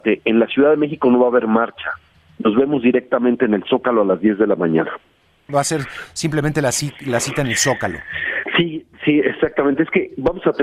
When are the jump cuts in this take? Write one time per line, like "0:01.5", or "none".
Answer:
0:05.5